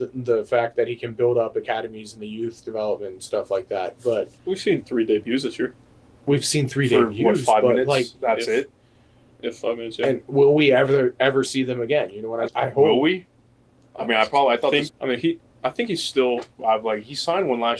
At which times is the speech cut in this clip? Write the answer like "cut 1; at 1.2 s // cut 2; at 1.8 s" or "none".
cut 1; at 12.5 s // cut 2; at 14.9 s // cut 3; at 16.6 s